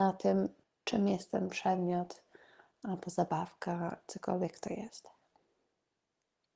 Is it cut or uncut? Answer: uncut